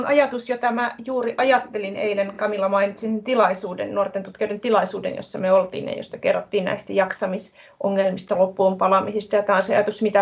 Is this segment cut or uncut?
uncut